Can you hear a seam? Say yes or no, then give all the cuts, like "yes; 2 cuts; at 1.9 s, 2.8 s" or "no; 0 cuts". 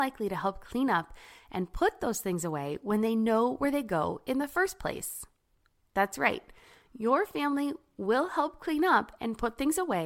no; 0 cuts